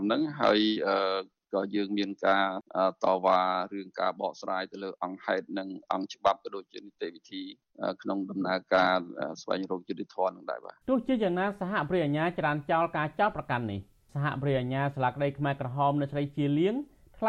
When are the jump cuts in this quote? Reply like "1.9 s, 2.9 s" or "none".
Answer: 10.8 s

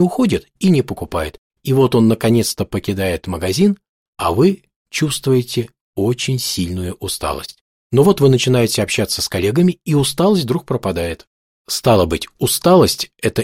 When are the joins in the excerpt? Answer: 1.5 s

